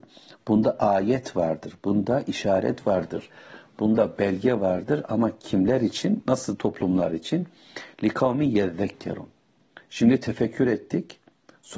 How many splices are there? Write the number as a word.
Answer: one